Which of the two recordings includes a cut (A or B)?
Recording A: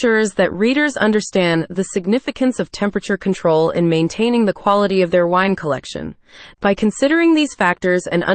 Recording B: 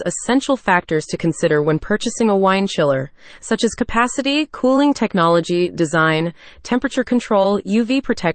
A